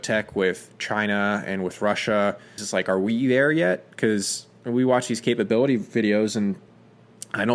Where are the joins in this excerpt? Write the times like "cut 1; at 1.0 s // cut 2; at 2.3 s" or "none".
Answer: cut 1; at 2.6 s